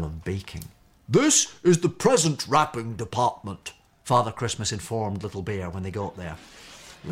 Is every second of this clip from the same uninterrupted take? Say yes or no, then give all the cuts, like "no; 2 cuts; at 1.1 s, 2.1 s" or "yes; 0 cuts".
no; 1 cut; at 0.9 s